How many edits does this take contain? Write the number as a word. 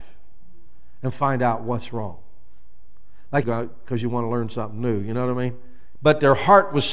two